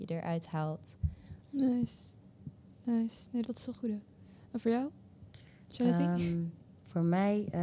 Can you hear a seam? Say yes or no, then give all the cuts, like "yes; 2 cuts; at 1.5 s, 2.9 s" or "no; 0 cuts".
yes; 2 cuts; at 1.4 s, 3.4 s